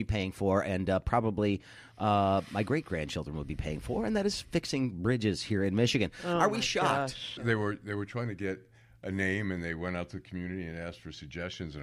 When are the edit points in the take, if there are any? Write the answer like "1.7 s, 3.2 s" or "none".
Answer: 7.4 s